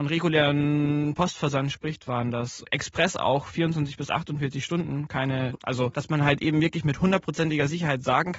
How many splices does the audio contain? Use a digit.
1